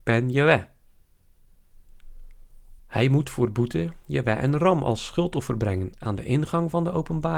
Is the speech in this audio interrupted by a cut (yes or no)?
yes